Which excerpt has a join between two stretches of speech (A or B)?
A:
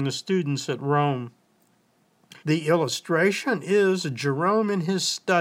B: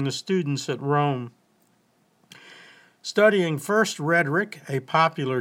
A